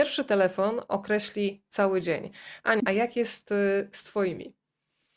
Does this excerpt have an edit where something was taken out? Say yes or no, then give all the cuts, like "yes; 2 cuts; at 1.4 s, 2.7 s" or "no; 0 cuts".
yes; 1 cut; at 2.8 s